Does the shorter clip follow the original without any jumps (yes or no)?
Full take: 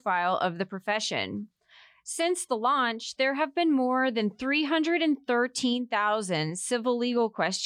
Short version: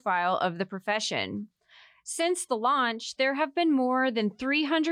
yes